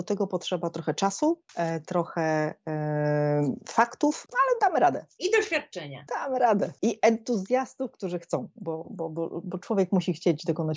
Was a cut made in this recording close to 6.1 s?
no; 1 cut; at 1.5 s

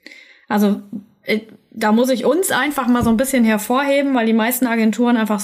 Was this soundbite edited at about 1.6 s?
no; 0 cuts

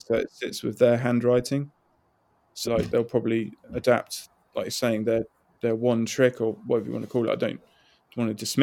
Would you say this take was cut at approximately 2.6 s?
yes; 1 cut; at 2.6 s

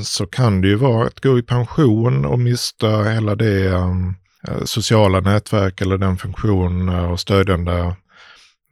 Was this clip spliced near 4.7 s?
no; 0 cuts

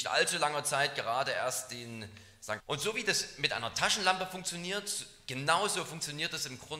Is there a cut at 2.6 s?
yes; 1 cut; at 2.6 s

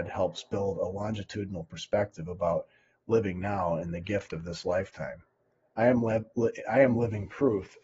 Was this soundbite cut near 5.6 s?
no; 0 cuts

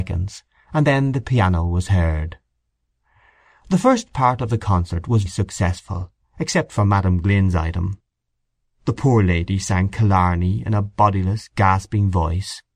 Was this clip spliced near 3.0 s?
no; 1 cut; at 5.3 s

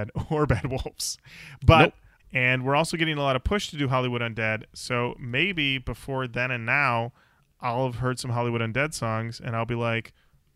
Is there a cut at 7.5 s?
no; 1 cut; at 2.2 s

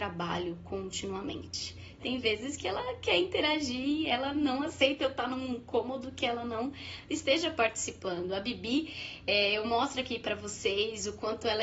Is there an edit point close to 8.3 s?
no; 1 cut; at 2.0 s

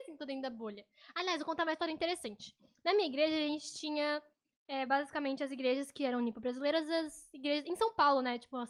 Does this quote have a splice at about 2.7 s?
no; 0 cuts

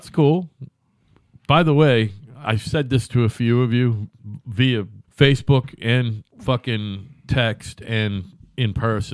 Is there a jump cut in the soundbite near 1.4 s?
no; 2 cuts; at 5.0 s, 6.3 s

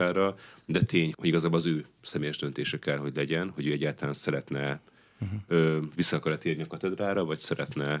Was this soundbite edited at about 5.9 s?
no; 1 cut; at 1.1 s

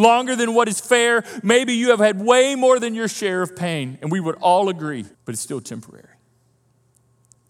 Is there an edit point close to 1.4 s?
no; 1 cut; at 5.1 s

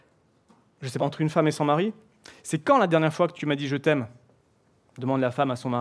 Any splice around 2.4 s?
no; 1 cut; at 1.0 s

